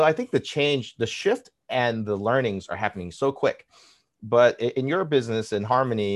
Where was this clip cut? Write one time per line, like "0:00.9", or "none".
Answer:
none